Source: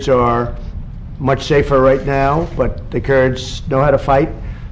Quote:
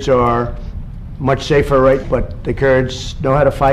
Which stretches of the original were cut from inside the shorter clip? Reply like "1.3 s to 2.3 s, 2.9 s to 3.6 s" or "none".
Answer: 2.0 s to 2.5 s

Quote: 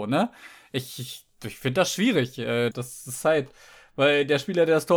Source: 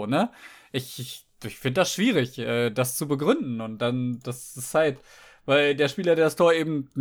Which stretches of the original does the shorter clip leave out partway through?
2.7 s to 4.2 s

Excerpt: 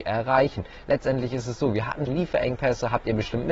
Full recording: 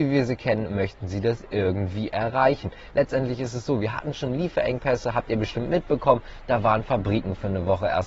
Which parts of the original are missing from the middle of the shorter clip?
4.1 s to 4.3 s

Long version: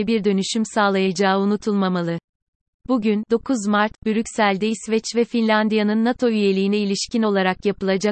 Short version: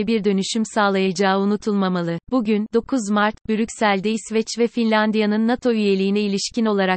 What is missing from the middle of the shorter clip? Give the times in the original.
2.2 s to 2.8 s

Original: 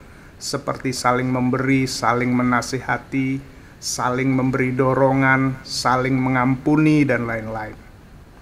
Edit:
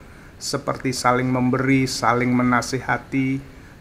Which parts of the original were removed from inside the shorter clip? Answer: none

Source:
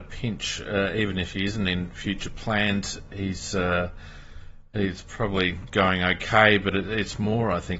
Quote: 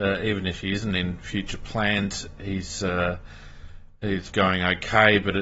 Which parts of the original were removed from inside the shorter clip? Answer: 5.0 s to 5.7 s

